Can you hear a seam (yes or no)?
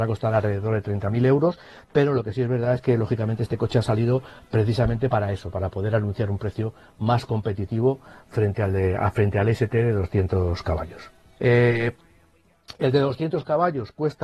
yes